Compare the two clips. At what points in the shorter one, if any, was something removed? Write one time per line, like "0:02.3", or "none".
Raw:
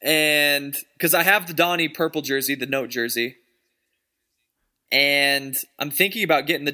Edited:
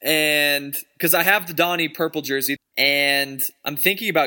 0:02.6